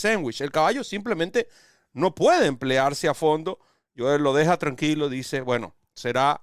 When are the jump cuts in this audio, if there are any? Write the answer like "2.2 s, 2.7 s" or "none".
none